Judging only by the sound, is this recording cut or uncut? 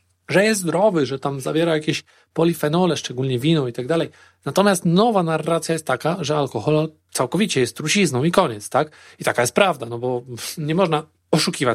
uncut